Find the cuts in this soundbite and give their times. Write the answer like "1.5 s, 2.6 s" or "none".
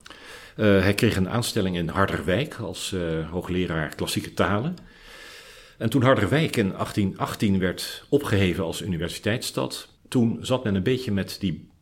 10.0 s